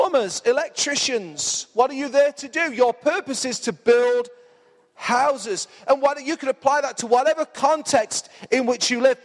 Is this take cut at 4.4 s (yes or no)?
no